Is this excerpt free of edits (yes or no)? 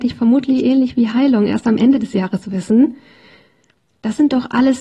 no